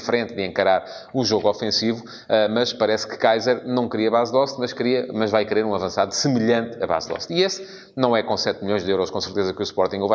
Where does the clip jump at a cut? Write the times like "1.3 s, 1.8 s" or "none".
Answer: none